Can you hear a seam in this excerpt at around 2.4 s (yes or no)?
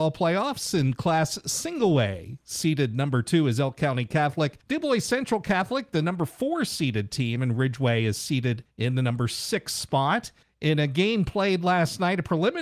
no